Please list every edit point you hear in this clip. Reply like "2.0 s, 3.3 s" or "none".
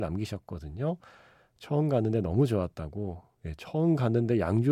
none